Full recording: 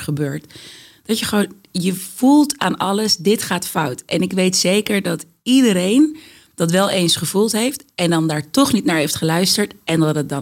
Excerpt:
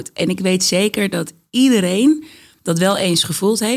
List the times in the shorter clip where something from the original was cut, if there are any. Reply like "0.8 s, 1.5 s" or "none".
none